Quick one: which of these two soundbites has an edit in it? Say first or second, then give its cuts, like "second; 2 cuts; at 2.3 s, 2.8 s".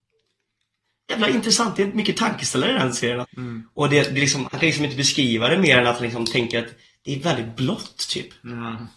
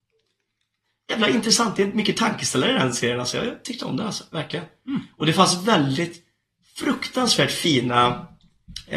first; 2 cuts; at 3.2 s, 4.4 s